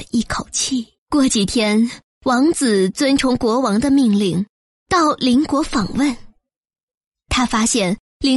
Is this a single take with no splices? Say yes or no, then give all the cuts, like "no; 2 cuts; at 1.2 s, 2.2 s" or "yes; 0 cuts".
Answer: no; 1 cut; at 1.0 s